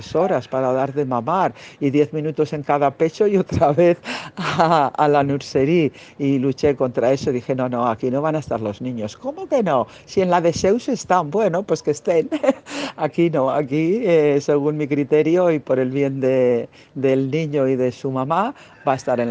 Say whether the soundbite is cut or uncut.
uncut